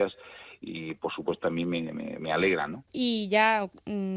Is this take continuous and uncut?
no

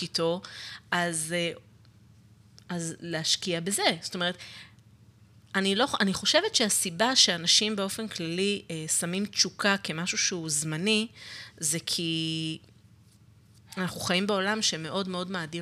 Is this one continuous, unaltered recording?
yes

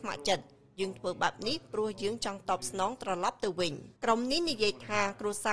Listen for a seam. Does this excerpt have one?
yes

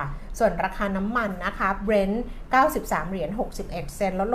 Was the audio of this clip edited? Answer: no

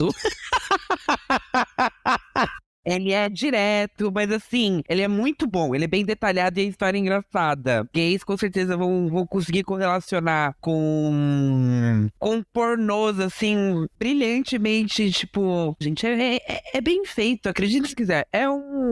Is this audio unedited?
no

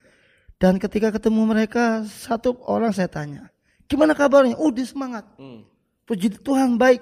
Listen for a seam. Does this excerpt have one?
no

